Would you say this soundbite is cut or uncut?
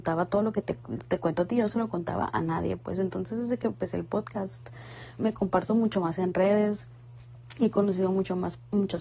cut